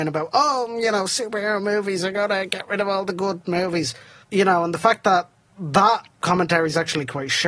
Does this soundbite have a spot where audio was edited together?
yes; 2 cuts; at 4.2 s, 6.1 s

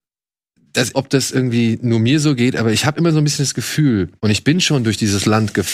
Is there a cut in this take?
yes; 2 cuts; at 0.9 s, 4.2 s

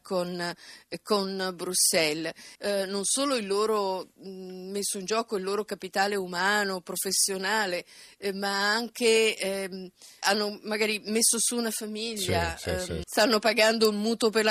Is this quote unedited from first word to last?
no; 3 cuts; at 2.6 s, 10.2 s, 13.0 s

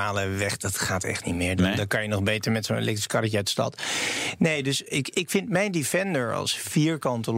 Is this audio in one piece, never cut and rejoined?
no; 1 cut; at 4.9 s

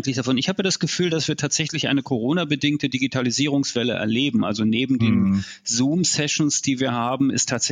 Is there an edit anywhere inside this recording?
no; 0 cuts

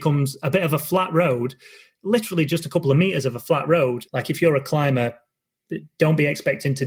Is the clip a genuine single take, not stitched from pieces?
no; 1 cut; at 4.1 s

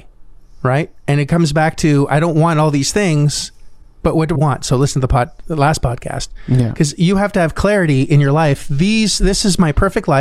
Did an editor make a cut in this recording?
yes; 1 cut; at 4.3 s

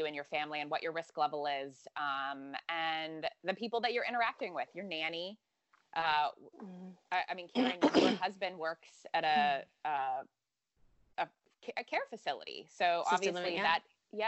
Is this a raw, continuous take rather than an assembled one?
yes; 0 cuts

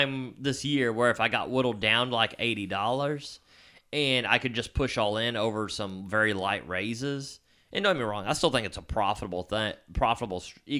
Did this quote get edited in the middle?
no; 0 cuts

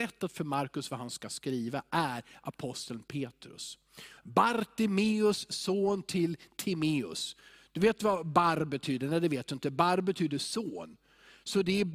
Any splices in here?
yes; 1 cut; at 4.2 s

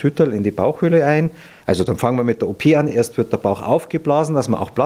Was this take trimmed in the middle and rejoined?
no; 0 cuts

